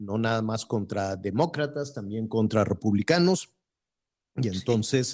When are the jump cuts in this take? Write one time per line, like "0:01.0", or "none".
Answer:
none